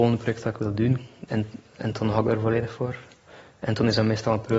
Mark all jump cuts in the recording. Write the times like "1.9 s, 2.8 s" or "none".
1.3 s